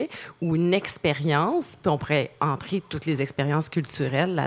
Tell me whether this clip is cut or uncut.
uncut